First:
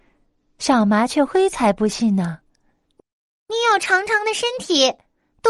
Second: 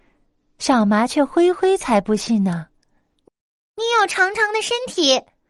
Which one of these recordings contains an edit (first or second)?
first